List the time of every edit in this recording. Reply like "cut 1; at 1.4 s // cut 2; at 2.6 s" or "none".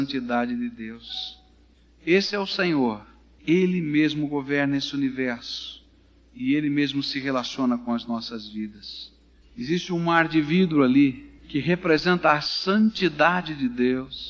cut 1; at 3.4 s // cut 2; at 11.4 s